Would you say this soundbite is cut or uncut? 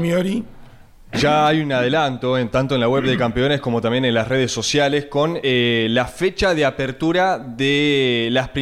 uncut